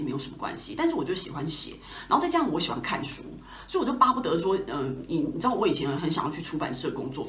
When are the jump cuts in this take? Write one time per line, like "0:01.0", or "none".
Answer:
0:06.0